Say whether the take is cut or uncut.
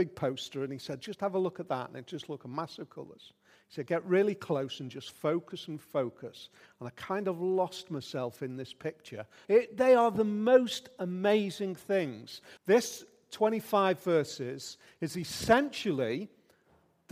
cut